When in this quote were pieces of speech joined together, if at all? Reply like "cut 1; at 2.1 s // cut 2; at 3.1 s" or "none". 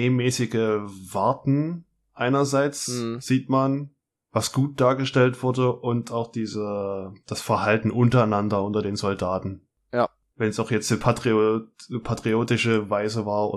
none